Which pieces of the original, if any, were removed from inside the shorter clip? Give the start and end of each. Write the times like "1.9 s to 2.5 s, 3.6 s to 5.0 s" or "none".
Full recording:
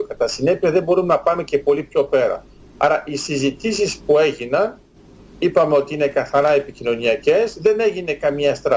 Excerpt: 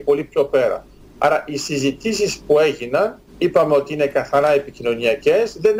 4.9 s to 5.3 s